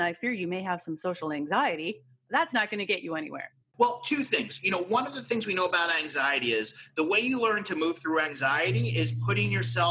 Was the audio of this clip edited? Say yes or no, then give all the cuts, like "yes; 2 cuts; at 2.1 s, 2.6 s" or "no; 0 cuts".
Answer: no; 0 cuts